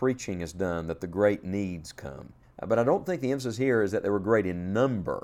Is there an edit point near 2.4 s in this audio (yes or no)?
yes